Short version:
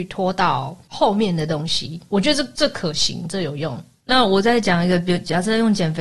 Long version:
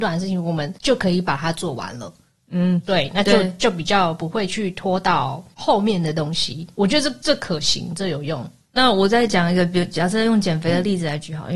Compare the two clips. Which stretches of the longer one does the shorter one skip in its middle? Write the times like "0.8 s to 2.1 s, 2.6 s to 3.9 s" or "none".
none